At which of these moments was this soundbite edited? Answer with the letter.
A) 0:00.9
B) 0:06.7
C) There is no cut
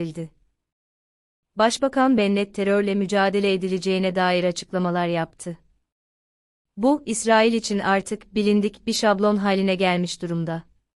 C